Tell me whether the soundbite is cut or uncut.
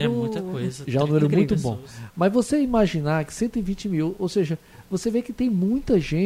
uncut